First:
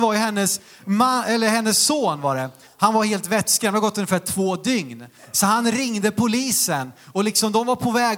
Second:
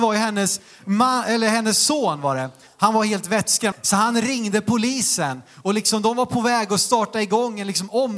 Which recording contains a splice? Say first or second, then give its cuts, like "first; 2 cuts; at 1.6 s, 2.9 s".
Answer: second; 1 cut; at 3.7 s